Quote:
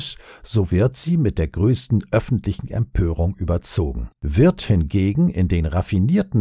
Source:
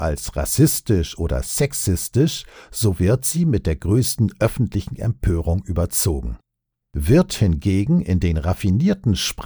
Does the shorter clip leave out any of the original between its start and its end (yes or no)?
yes